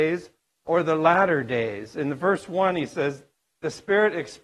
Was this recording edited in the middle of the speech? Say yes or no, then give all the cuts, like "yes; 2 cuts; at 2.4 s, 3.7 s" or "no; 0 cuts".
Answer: no; 0 cuts